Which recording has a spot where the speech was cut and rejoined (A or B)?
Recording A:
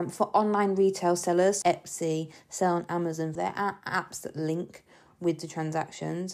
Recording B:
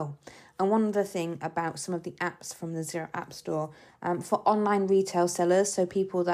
A